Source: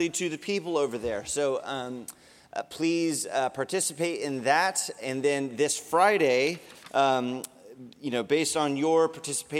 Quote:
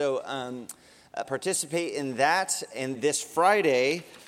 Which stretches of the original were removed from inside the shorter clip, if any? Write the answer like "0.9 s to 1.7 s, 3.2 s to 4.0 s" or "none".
2.6 s to 3.5 s, 5.2 s to 5.5 s